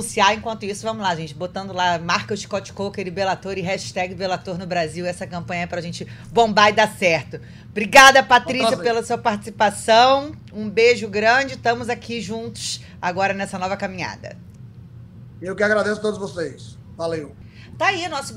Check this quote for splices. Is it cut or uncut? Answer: uncut